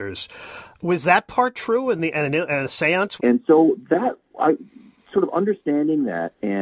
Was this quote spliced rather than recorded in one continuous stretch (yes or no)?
yes